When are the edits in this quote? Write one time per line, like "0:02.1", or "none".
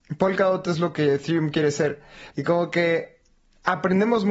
0:02.3